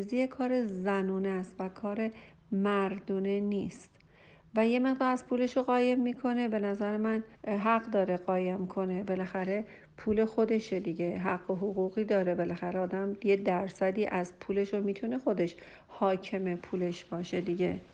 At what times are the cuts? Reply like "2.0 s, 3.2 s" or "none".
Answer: 7.3 s